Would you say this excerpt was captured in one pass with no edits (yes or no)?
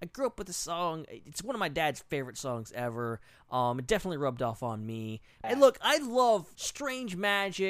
no